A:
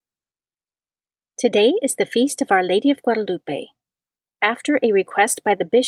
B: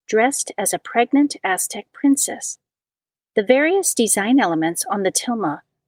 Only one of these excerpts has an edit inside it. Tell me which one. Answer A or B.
A